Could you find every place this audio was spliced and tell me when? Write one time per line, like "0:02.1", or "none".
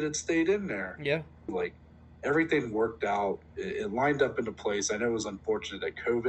0:01.5